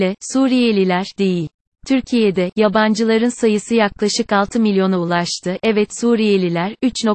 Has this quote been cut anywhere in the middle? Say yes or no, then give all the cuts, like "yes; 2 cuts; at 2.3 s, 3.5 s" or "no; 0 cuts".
no; 0 cuts